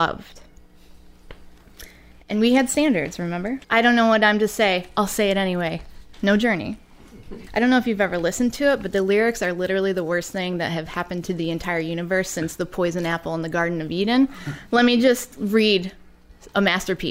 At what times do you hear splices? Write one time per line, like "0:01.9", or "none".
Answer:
0:03.6
0:06.1
0:07.5